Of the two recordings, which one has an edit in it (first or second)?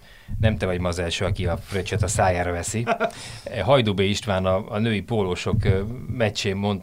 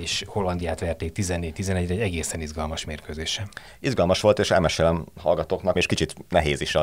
second